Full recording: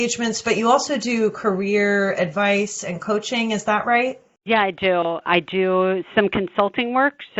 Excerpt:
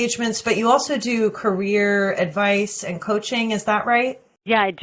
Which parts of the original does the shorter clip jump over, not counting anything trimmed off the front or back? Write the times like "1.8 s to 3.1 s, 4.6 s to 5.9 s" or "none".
none